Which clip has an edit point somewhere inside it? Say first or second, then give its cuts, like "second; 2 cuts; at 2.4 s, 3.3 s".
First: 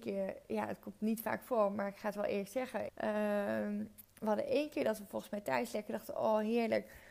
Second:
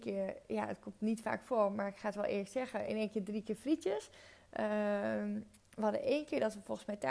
first; 1 cut; at 2.9 s